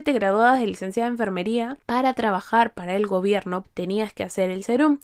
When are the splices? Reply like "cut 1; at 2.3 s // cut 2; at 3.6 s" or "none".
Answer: cut 1; at 1.8 s // cut 2; at 3.6 s